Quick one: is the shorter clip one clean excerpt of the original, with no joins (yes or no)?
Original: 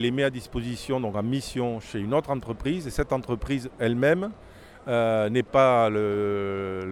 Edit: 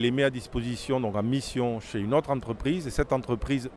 yes